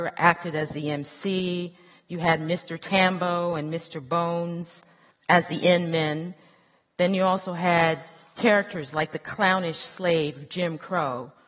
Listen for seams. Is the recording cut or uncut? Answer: uncut